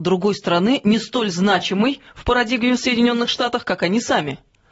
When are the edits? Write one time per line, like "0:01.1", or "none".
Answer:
none